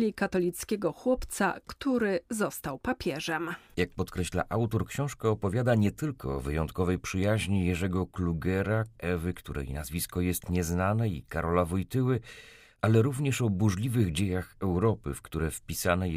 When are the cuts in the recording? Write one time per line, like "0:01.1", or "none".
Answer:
0:09.0